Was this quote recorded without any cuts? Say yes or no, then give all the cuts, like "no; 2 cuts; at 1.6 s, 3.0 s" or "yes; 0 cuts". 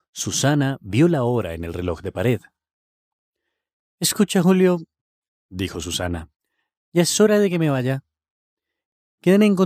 yes; 0 cuts